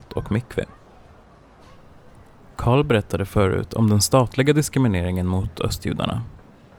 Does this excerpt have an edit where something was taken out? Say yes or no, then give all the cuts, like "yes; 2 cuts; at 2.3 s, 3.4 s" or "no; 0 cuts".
no; 0 cuts